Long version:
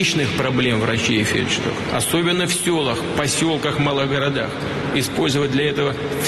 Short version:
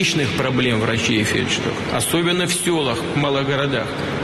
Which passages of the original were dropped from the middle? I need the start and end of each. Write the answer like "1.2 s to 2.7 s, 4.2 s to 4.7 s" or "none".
3.1 s to 3.8 s

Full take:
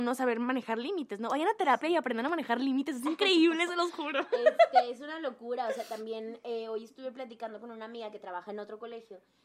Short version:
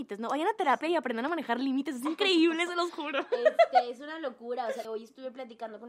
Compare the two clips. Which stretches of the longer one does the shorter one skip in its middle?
5.9 s to 6.7 s

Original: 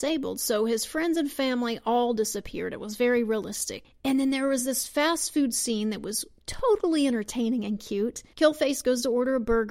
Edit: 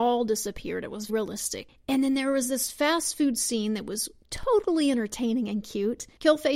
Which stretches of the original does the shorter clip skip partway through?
3.0 s to 3.2 s

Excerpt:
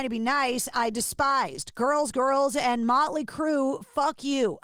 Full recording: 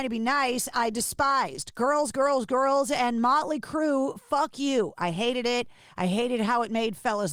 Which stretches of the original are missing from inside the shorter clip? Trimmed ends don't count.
2.1 s to 2.5 s

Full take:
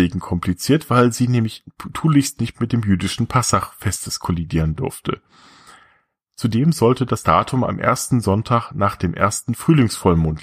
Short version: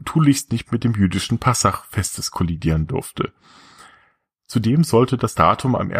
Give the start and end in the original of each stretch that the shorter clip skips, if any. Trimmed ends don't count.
none

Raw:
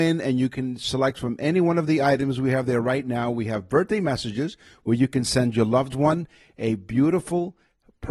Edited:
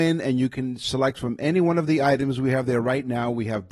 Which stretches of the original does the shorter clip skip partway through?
none

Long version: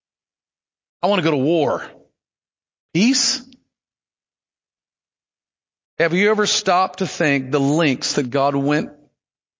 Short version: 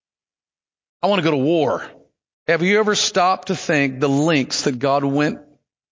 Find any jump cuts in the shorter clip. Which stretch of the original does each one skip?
2.3 s to 5.8 s

